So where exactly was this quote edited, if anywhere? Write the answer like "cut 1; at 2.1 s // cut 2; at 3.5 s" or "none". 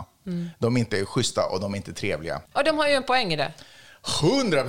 cut 1; at 2.5 s